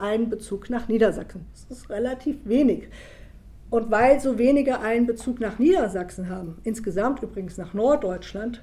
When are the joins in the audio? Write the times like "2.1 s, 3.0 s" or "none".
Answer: none